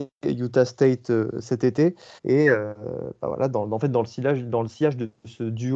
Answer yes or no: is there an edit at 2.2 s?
yes